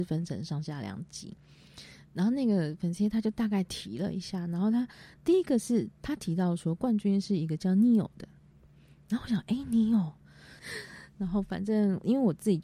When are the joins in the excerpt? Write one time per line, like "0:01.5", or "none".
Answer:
0:10.6